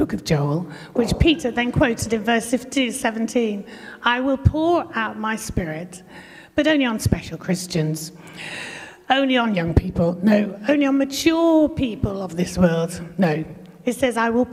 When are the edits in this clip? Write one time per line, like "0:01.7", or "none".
none